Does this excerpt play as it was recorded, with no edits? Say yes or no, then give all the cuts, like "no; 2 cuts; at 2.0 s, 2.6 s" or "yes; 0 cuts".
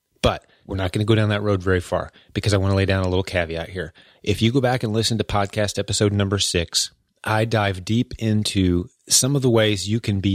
yes; 0 cuts